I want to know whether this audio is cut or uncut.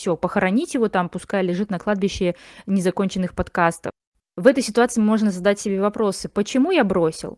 cut